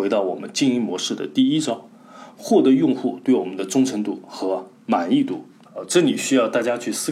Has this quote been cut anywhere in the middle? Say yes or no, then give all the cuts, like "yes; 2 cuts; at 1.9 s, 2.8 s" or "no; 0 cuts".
yes; 1 cut; at 5.7 s